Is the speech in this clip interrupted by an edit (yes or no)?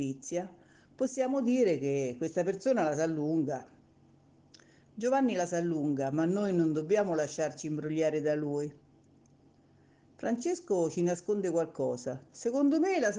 no